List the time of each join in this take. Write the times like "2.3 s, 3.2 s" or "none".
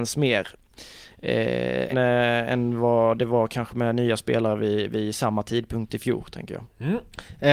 1.9 s